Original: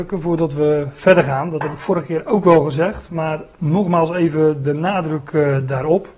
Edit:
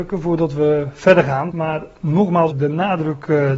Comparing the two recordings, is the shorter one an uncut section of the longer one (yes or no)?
no